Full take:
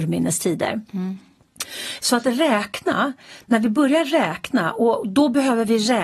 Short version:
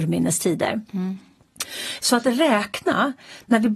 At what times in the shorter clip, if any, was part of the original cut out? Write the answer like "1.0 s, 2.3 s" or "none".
none